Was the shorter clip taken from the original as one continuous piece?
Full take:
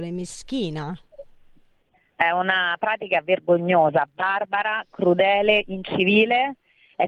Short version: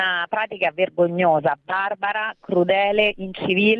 yes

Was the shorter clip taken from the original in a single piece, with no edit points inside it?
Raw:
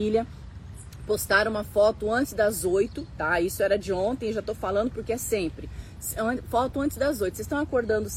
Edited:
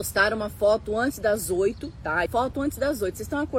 no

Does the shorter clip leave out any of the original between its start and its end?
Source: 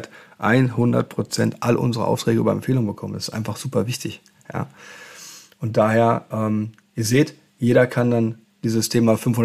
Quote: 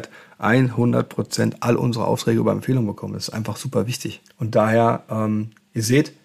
yes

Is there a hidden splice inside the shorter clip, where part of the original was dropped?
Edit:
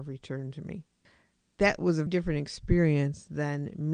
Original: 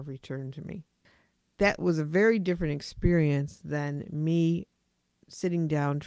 yes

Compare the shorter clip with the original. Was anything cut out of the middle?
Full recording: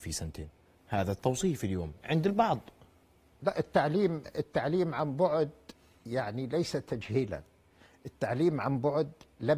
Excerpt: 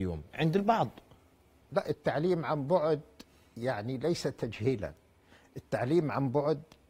yes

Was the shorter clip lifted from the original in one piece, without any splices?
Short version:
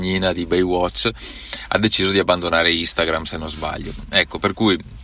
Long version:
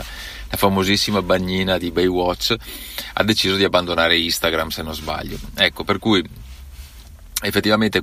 yes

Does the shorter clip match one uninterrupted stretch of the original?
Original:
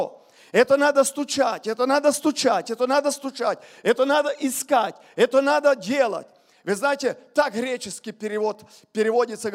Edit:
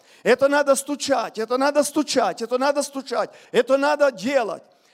no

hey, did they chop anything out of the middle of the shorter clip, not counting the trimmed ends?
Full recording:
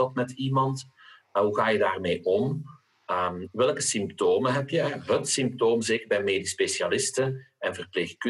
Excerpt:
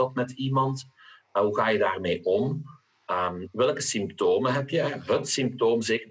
no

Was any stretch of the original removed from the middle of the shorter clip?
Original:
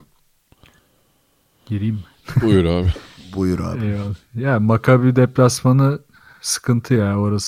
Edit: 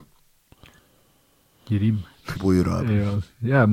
yes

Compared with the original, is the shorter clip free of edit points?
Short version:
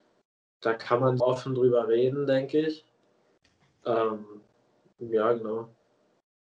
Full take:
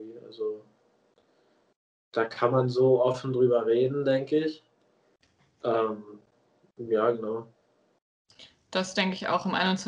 no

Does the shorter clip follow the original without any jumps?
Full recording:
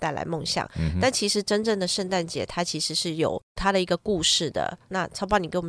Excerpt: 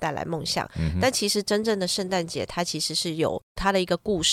yes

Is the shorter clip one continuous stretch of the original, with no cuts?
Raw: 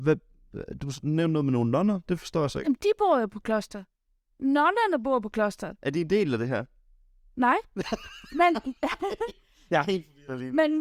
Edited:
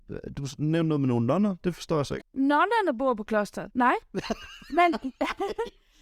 no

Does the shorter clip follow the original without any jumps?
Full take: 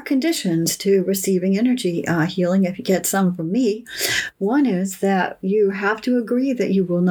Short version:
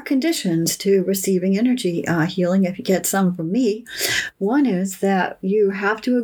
yes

